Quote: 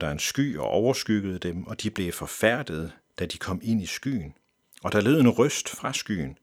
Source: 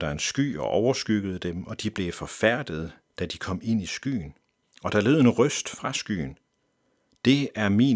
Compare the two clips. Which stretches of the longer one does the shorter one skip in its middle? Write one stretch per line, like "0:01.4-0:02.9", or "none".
none